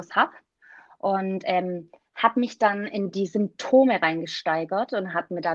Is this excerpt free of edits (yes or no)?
yes